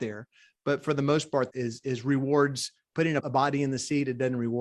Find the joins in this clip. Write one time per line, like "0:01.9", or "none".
0:01.5
0:03.2